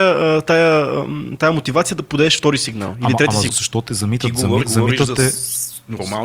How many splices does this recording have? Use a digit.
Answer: 2